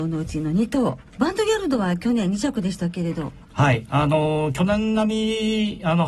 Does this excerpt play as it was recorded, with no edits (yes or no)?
no